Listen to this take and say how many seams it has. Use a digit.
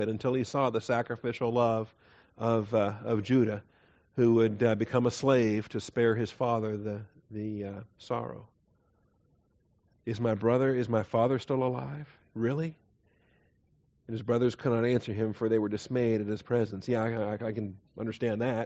0